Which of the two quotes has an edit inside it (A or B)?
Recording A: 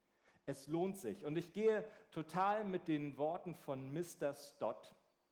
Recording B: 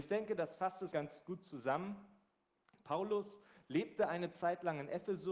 B